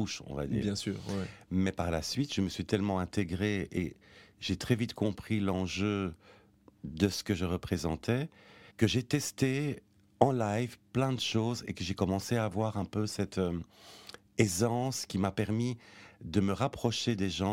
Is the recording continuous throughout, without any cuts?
no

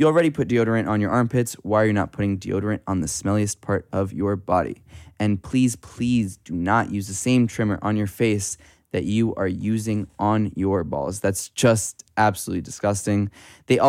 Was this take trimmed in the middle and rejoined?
no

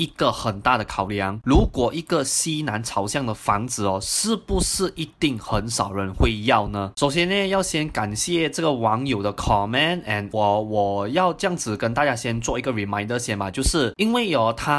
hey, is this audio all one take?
no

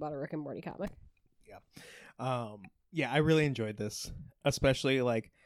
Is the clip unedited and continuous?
yes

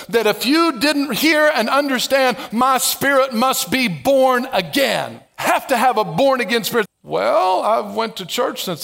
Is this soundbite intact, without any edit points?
no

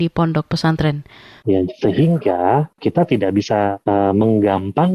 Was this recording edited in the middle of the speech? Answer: yes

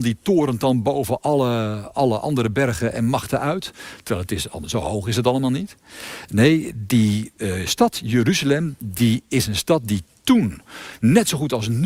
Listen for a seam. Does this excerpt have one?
no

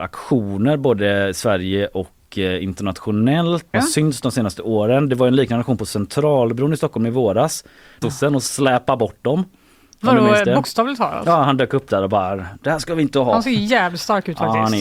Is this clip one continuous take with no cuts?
no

